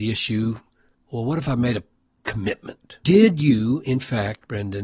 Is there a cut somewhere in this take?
yes; 1 cut; at 3.0 s

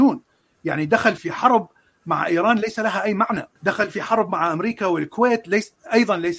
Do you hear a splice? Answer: yes; 2 cuts; at 1.2 s, 3.6 s

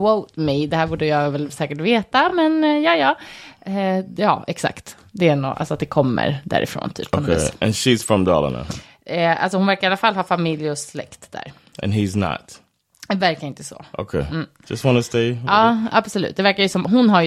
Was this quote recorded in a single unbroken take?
yes; 0 cuts

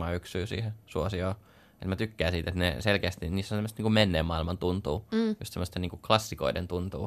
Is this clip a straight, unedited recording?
yes; 0 cuts

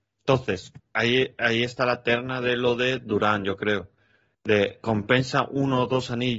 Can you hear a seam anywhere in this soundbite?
no; 0 cuts

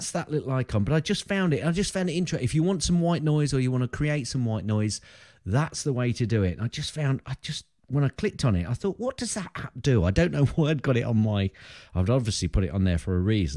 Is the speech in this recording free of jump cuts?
yes; 0 cuts

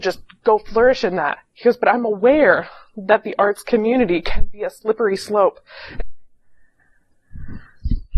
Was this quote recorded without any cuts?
no; 2 cuts; at 1.5 s, 6.0 s

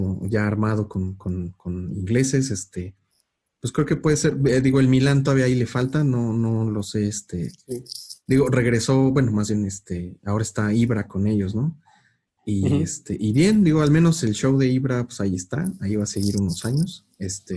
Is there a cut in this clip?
no; 0 cuts

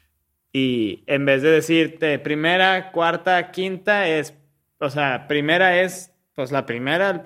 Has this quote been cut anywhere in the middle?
no; 0 cuts

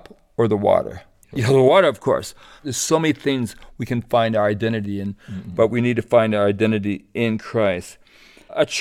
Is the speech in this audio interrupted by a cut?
yes; 2 cuts; at 1.2 s, 2.6 s

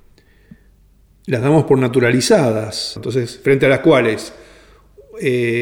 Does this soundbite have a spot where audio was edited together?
yes; 1 cut; at 3.0 s

